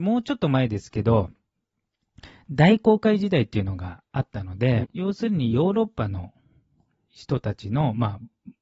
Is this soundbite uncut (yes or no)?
no